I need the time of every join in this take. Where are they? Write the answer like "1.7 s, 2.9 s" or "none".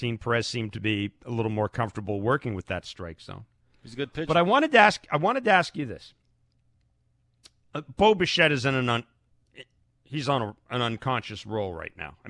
none